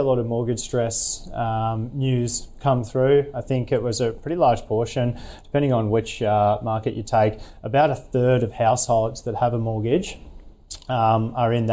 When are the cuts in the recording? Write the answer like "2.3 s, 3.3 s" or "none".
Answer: none